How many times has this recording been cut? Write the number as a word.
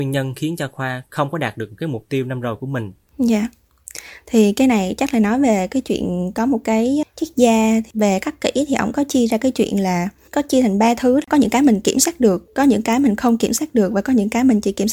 one